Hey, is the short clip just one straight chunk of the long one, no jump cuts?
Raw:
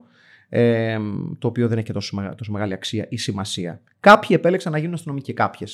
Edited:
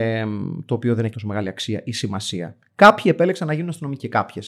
no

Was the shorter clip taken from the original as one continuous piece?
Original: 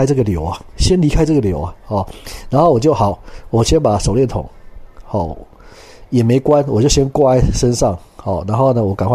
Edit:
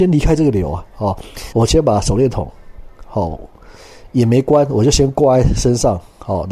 no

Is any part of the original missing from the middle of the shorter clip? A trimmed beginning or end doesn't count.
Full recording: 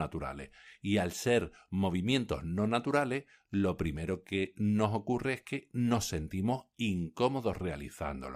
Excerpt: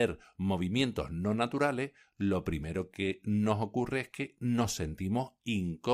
no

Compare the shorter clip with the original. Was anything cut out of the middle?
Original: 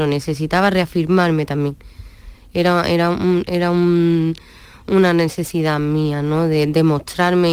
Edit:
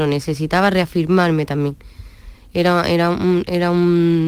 no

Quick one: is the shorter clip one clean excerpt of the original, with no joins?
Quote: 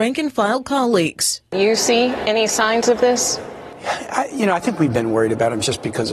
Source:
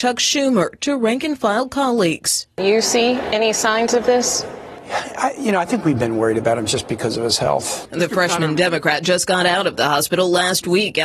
yes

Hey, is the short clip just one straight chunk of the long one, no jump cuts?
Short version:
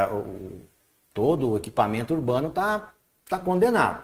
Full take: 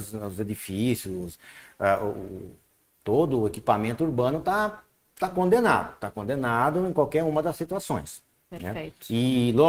yes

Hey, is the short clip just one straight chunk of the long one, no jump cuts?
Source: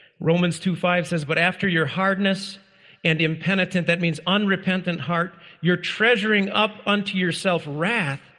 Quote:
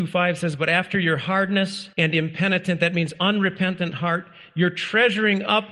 no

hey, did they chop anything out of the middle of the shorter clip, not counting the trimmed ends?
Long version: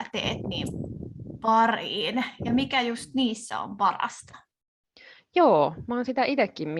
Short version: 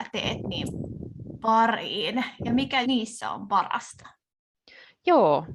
yes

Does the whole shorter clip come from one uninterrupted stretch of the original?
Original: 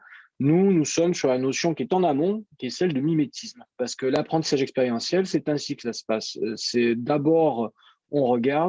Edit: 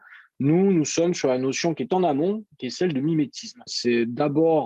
no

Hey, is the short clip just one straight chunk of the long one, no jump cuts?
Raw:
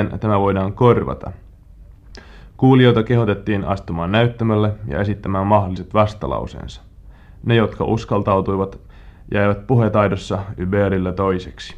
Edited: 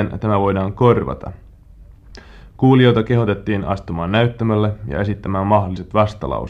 yes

